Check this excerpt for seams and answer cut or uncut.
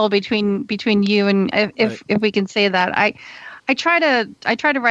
cut